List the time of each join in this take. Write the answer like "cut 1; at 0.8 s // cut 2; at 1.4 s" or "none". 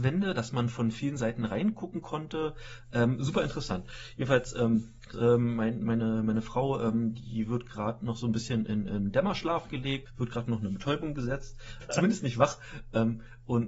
cut 1; at 5.1 s // cut 2; at 11.8 s